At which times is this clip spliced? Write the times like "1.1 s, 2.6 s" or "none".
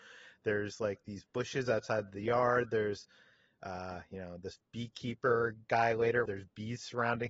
6.3 s